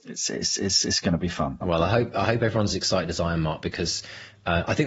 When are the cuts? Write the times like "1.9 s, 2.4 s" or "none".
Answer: 1.6 s